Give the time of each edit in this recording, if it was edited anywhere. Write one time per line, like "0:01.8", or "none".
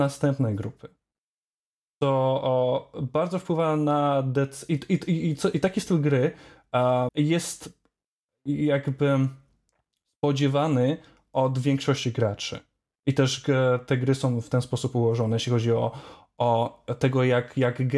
0:07.1